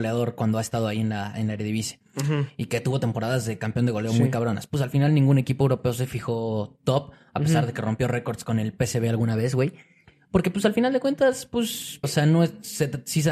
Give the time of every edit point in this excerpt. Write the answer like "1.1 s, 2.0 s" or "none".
12.0 s